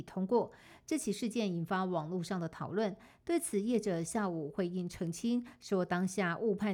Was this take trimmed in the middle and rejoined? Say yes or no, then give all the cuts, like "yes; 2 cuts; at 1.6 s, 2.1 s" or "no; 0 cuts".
no; 0 cuts